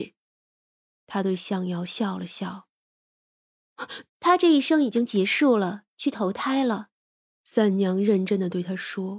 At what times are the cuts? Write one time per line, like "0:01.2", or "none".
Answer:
0:04.1
0:07.4